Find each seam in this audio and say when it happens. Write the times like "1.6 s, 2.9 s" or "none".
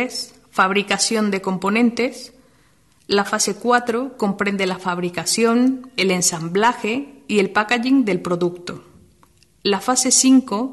none